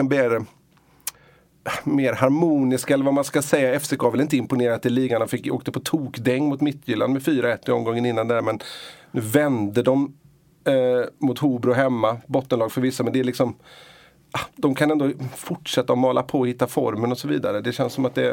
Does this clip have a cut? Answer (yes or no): no